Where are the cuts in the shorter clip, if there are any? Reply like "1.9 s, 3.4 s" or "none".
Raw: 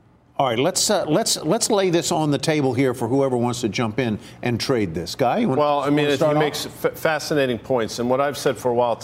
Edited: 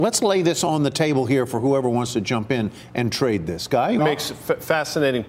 4.0 s